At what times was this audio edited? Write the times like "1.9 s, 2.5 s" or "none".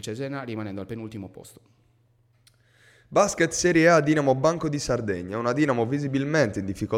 none